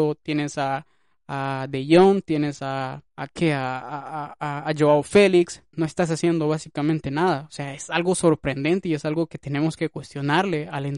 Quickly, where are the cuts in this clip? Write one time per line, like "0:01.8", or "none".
0:05.7